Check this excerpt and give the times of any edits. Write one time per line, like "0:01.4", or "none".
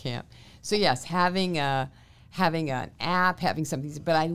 none